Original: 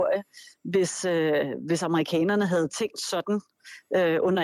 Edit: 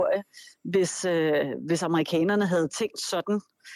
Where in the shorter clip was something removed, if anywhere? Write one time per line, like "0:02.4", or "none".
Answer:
none